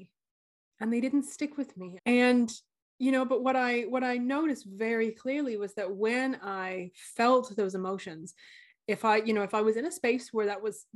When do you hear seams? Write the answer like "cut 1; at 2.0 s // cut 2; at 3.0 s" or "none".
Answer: cut 1; at 2.0 s // cut 2; at 8.7 s